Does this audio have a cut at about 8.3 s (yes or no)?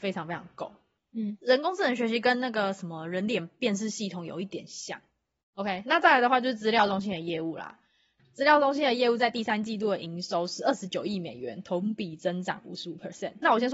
no